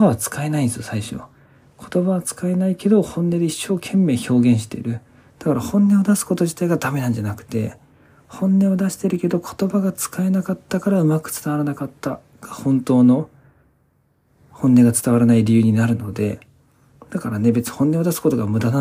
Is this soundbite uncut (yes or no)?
no